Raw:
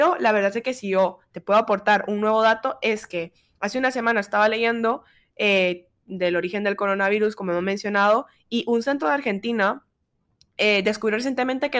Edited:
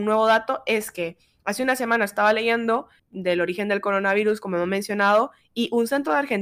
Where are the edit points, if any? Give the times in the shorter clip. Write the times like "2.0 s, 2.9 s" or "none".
3.0 s